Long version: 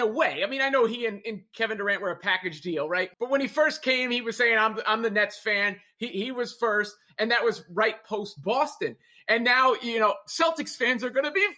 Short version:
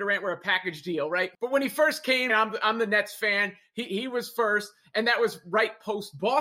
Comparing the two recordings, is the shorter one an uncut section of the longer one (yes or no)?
no